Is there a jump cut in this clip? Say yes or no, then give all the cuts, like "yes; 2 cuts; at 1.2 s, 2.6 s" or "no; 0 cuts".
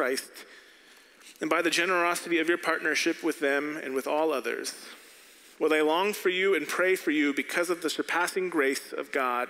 no; 0 cuts